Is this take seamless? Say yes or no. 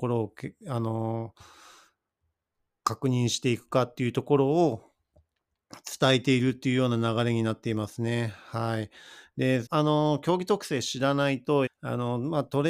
no